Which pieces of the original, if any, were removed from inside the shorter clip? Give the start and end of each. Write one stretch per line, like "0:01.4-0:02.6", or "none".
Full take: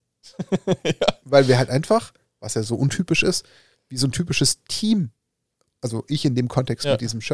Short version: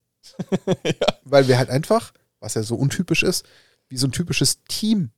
none